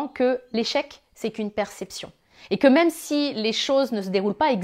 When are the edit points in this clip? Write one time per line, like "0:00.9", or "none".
none